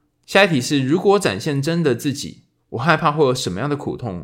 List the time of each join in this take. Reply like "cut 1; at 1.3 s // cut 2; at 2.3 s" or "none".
none